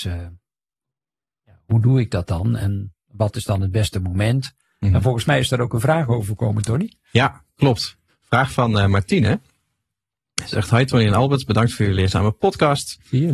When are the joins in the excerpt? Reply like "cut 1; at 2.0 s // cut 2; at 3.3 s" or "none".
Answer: cut 1; at 8.1 s